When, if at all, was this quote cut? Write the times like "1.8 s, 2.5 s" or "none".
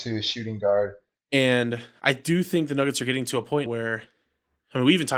1.2 s, 3.7 s